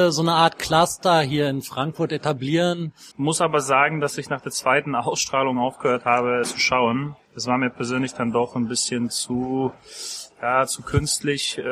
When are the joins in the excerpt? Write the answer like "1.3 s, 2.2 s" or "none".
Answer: 3.1 s, 6.4 s

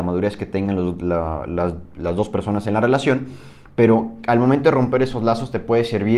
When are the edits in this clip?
none

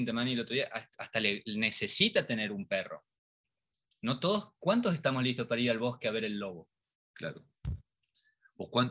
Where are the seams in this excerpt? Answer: none

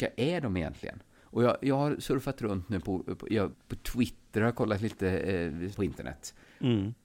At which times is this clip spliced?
3.5 s, 5.7 s

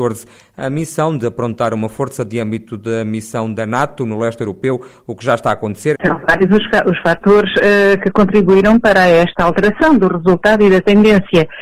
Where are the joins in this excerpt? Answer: 5.9 s

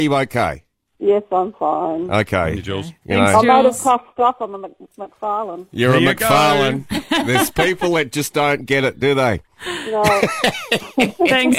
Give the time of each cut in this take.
none

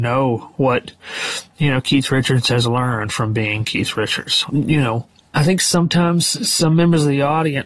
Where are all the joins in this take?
4.5 s

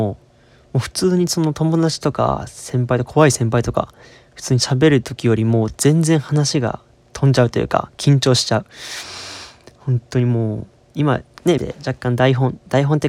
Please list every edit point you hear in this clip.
11.6 s

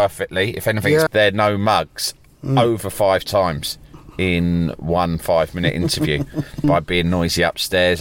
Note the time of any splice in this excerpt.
1.1 s, 6.6 s

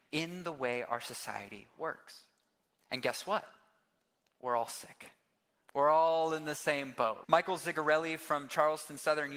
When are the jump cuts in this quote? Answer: 7.2 s

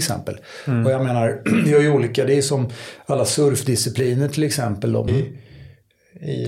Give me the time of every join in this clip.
5.1 s

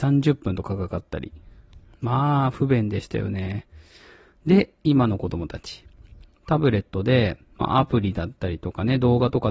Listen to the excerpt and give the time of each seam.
none

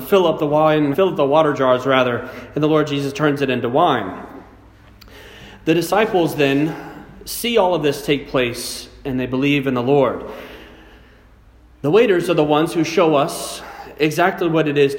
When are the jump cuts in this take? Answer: 0.9 s

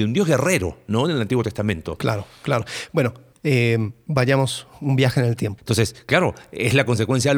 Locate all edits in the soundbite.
3.3 s, 5.6 s

